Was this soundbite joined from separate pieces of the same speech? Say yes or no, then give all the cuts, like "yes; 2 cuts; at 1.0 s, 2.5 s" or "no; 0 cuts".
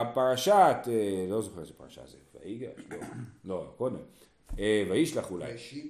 no; 0 cuts